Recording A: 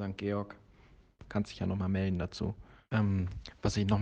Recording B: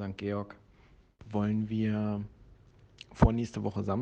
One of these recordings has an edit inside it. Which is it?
A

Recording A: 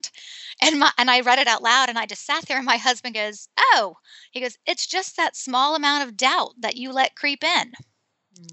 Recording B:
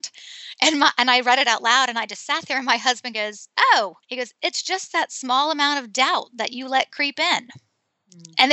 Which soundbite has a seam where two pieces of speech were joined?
B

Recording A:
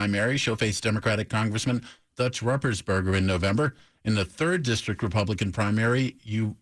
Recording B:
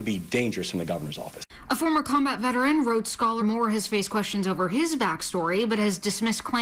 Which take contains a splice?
B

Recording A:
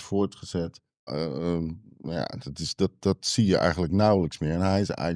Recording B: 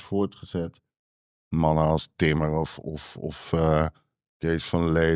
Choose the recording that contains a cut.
A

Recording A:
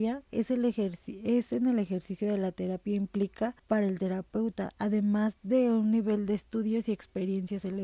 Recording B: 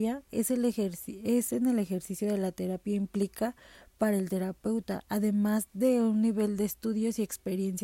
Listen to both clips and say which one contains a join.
A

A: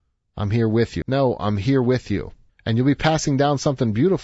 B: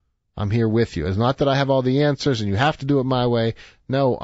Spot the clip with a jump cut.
A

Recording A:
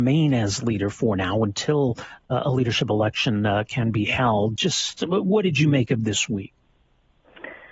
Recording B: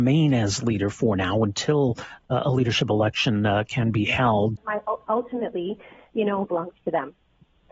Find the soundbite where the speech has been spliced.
B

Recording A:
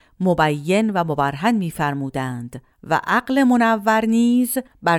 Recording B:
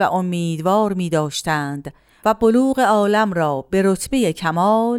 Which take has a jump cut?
A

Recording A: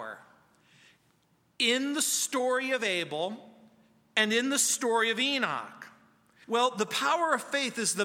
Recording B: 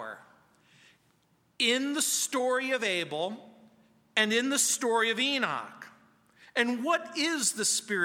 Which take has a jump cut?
A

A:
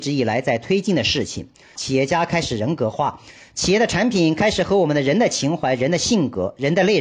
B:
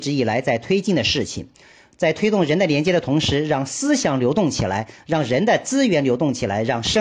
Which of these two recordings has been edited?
A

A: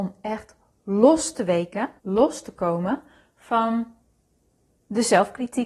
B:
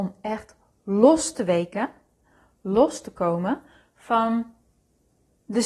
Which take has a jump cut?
A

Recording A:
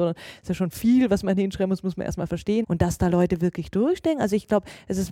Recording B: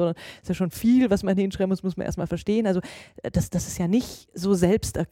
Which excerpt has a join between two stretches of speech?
A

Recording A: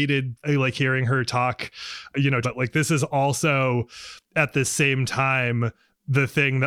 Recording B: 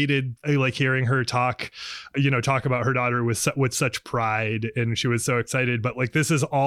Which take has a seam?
A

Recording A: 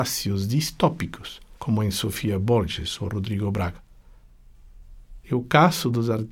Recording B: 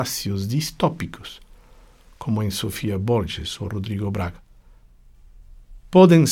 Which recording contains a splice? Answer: A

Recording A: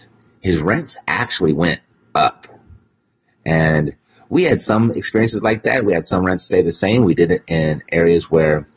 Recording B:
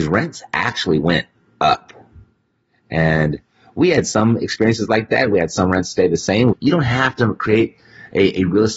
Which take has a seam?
B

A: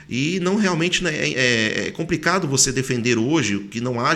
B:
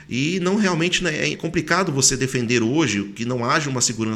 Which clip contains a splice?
B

